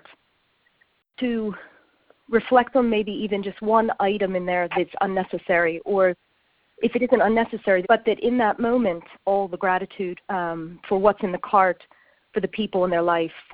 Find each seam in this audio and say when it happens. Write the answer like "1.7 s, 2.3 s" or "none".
7.8 s, 9.1 s, 10.2 s